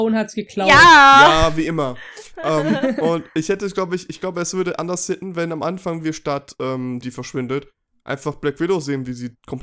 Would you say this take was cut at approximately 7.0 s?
yes; 1 cut; at 7.0 s

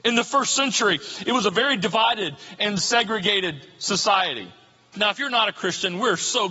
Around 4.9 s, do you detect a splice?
yes; 1 cut; at 4.9 s

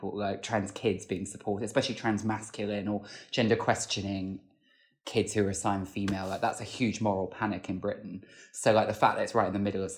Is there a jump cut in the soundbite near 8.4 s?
no; 0 cuts

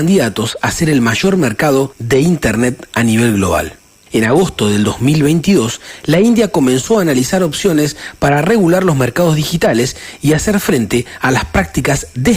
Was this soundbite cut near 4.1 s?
no; 0 cuts

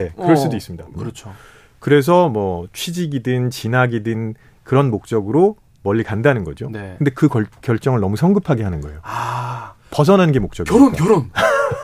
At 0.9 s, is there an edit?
yes; 1 cut; at 0.9 s

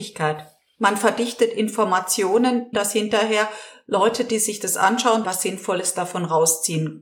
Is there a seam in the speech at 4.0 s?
no; 2 cuts; at 2.7 s, 5.2 s

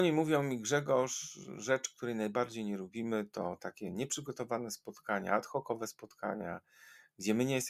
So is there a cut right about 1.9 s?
no; 0 cuts

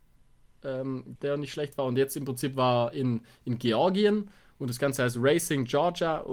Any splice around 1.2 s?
yes; 1 cut; at 1.2 s

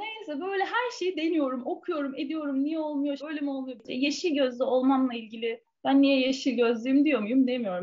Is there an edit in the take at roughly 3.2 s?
yes; 1 cut; at 3.2 s

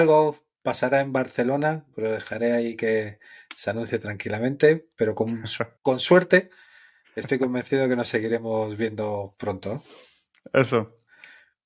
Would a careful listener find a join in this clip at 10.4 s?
no; 2 cuts; at 1.9 s, 5.8 s

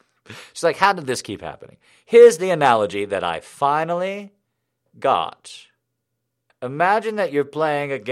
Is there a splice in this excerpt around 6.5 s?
yes; 1 cut; at 6.5 s

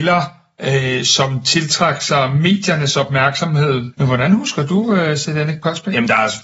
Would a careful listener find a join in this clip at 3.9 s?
yes; 1 cut; at 3.9 s

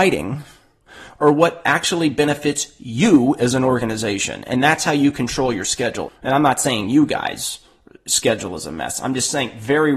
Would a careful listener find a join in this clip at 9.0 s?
no; 1 cut; at 6.1 s

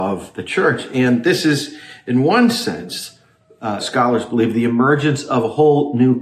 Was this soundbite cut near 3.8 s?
yes; 1 cut; at 3.8 s

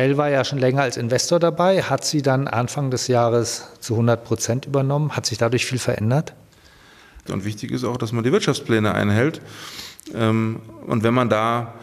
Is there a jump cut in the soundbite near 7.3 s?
yes; 1 cut; at 7.3 s

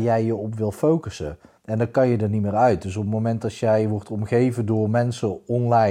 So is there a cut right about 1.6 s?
yes; 1 cut; at 1.6 s

